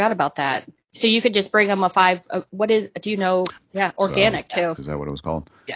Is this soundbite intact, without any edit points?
no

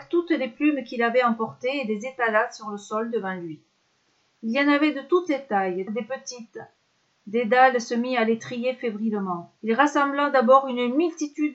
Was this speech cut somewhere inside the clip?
yes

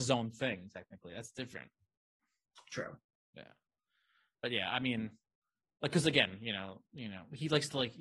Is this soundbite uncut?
yes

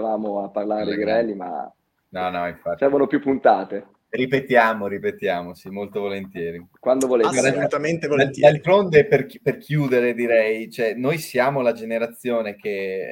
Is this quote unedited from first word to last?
yes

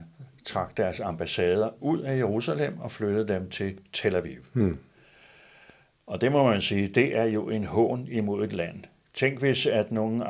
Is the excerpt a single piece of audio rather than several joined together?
yes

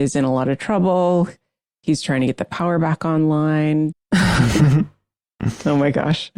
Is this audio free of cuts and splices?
no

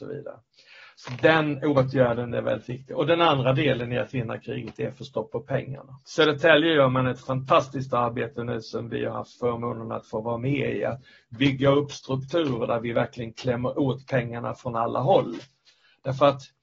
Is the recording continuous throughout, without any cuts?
no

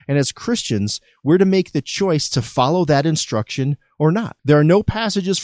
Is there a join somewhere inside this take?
yes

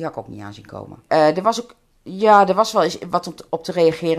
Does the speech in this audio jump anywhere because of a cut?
yes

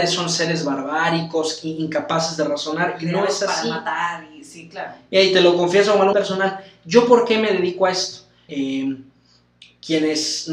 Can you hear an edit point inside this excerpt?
yes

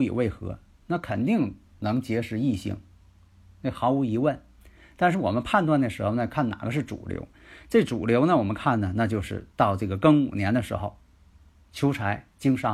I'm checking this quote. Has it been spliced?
no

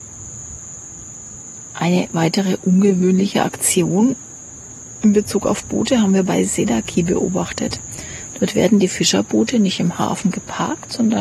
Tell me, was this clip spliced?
no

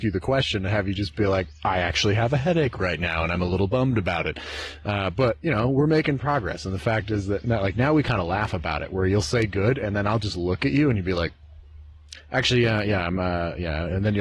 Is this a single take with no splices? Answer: yes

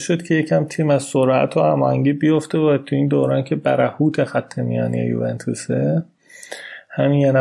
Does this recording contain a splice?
no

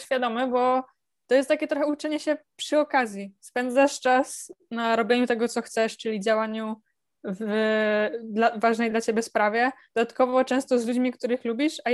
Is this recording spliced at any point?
no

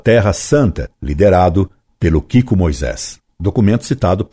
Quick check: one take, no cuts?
no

